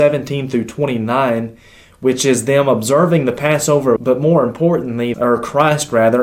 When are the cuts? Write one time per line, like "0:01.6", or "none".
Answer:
0:04.0
0:05.1